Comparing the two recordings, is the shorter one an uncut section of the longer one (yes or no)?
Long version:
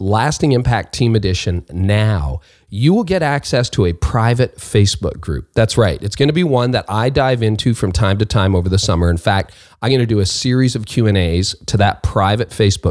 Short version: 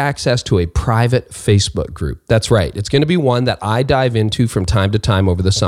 yes